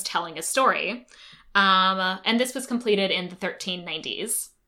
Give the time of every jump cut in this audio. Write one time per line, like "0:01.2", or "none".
none